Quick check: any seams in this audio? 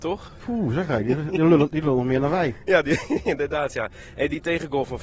no; 0 cuts

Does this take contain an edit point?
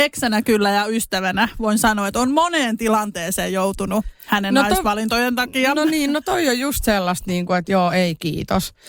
no; 0 cuts

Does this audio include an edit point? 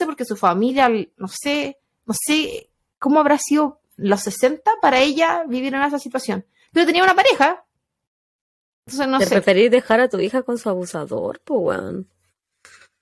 no; 0 cuts

